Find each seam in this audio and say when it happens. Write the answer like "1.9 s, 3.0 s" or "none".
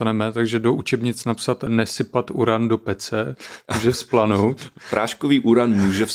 none